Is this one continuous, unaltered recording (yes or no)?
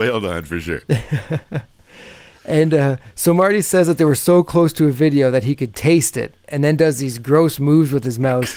yes